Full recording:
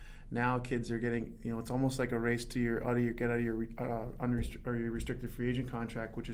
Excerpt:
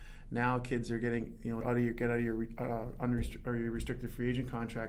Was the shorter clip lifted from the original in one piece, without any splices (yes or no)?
no